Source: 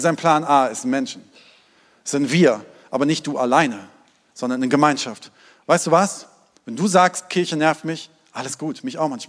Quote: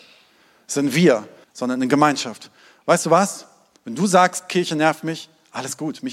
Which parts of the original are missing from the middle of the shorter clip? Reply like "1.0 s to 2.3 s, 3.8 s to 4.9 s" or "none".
2.8 s to 4.2 s

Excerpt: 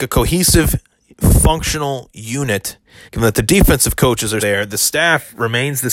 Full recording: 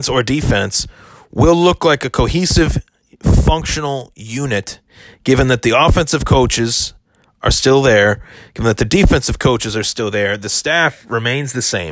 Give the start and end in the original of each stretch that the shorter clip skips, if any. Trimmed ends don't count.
5.1 s to 8.5 s, 9.8 s to 10.1 s

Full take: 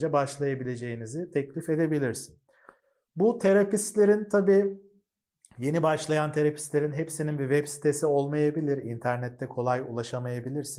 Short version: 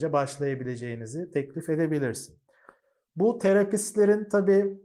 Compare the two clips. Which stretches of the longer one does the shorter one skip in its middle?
none

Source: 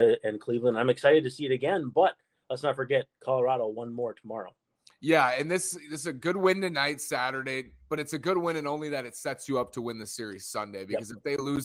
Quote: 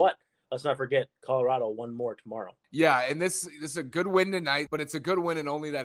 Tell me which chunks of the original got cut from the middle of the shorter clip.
4.6 s to 4.9 s, 7.0 s to 7.9 s

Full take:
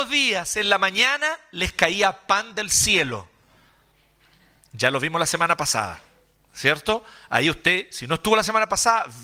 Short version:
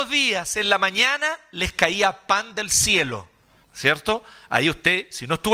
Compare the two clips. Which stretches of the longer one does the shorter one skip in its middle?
3.6 s to 6.4 s

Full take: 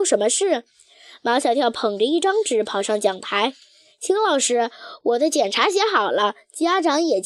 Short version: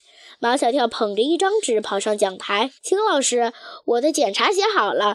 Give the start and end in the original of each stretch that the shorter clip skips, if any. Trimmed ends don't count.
3.6 s to 3.9 s

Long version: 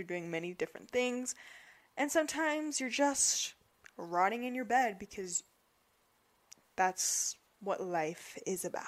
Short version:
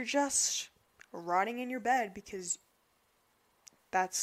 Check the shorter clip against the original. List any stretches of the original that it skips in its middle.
none

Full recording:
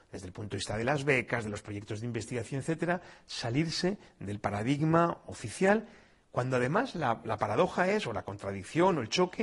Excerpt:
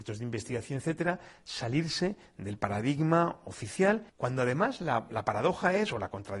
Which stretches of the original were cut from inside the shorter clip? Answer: 5.9 s to 6.2 s

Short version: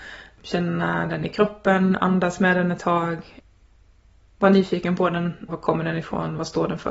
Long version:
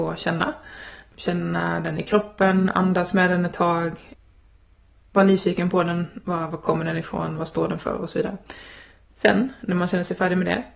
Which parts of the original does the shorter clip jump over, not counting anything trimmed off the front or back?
6.2 s to 6.5 s

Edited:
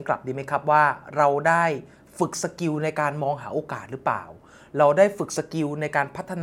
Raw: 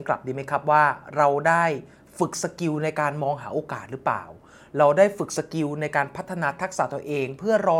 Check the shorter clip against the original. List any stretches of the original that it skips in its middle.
none

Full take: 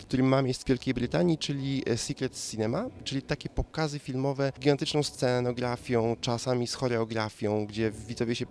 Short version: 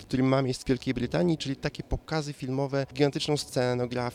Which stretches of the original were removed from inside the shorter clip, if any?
1.4 s to 3.0 s

